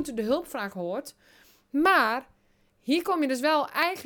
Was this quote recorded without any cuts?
yes; 0 cuts

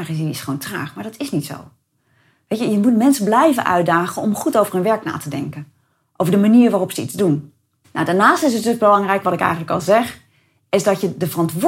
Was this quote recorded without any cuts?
no; 1 cut; at 7.8 s

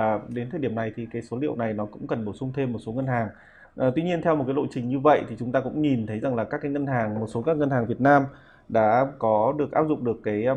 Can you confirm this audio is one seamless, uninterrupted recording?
yes; 0 cuts

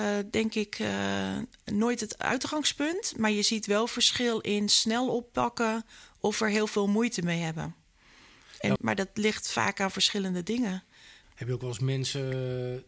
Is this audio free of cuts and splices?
no; 2 cuts; at 8.8 s, 11.2 s

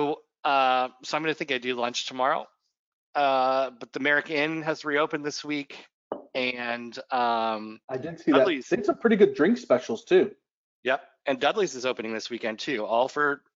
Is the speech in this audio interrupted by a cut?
no; 0 cuts

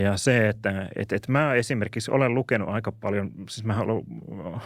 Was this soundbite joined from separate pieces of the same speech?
no; 0 cuts

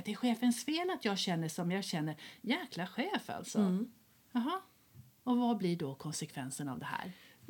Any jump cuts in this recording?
no; 0 cuts

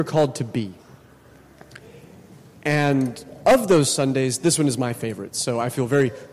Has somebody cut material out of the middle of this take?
no; 0 cuts

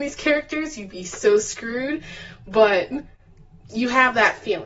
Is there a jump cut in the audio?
no; 0 cuts

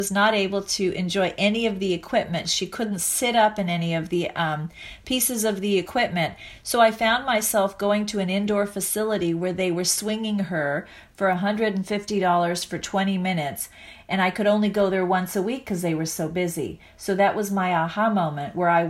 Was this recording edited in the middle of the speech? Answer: yes; 1 cut; at 2.4 s

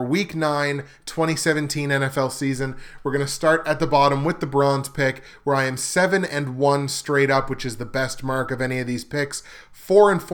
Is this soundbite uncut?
yes; 0 cuts

